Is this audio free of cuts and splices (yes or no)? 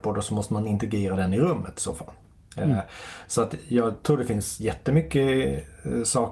yes